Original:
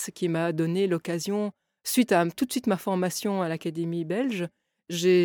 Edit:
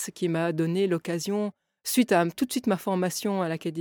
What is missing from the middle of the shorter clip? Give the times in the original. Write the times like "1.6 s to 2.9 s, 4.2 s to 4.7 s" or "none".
none